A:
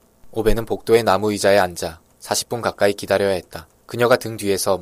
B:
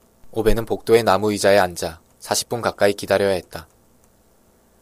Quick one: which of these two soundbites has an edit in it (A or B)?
A